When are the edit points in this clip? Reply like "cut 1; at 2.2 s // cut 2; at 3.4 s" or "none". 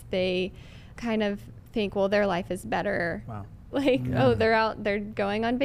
cut 1; at 0.9 s // cut 2; at 3.7 s